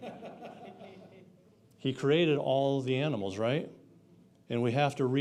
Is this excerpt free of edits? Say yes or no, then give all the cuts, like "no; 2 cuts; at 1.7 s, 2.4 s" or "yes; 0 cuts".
yes; 0 cuts